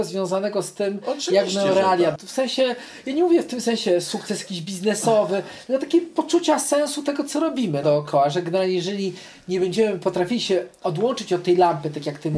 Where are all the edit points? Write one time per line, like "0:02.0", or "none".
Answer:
0:02.2
0:07.8